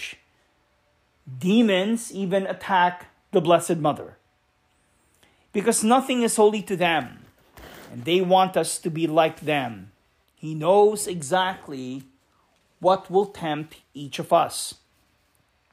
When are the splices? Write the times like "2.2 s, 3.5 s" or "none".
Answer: 10.2 s